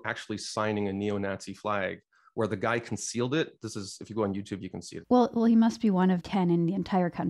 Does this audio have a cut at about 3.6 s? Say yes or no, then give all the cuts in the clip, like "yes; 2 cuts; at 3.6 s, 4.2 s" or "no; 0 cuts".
no; 2 cuts; at 5.0 s, 6.2 s